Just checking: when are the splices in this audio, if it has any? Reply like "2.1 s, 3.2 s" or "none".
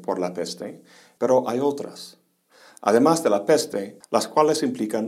1.2 s, 4.0 s